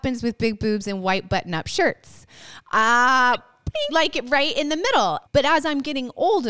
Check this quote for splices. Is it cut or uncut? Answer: cut